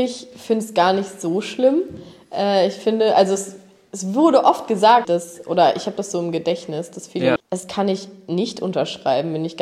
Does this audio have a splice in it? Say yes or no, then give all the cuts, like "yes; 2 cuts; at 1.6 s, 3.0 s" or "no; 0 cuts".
yes; 2 cuts; at 5.0 s, 7.4 s